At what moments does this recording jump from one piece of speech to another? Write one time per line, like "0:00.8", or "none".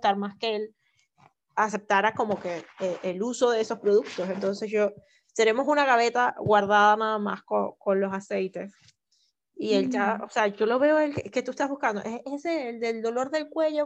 none